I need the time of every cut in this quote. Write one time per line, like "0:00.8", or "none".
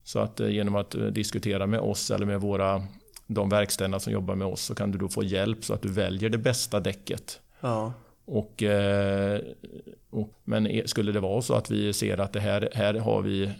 0:10.3